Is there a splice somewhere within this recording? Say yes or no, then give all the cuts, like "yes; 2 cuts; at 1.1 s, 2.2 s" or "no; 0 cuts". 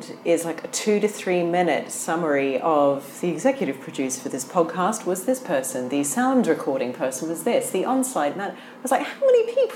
no; 0 cuts